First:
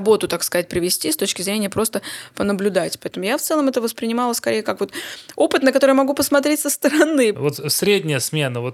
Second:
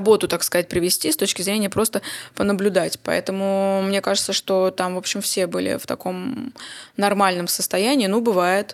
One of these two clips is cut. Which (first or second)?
first